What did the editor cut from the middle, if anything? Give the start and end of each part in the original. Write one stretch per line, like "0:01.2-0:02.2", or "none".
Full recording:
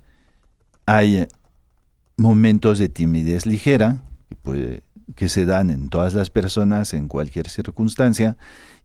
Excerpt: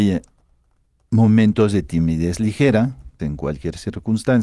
0:04.3-0:06.9